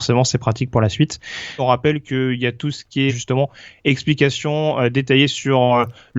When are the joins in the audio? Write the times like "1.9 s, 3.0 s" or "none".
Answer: 1.6 s, 3.1 s